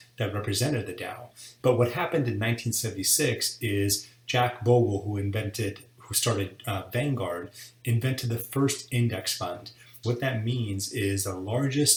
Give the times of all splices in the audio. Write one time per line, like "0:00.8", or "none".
0:01.6
0:10.0